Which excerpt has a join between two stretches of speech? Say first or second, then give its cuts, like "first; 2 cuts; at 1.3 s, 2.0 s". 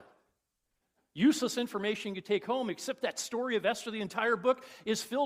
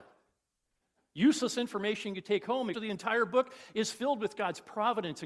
second; 1 cut; at 2.7 s